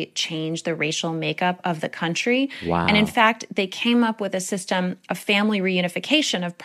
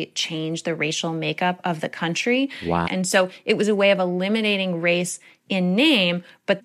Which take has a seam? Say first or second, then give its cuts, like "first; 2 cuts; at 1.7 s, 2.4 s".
second; 1 cut; at 2.8 s